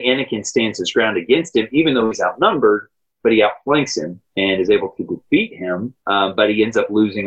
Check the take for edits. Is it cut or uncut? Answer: cut